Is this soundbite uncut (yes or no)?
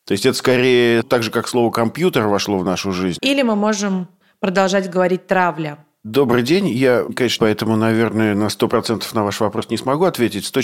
no